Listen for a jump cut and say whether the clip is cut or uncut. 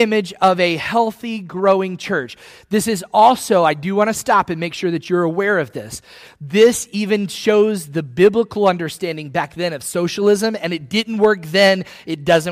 uncut